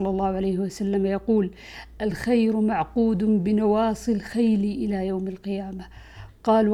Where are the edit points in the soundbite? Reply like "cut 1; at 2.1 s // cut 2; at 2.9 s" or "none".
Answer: none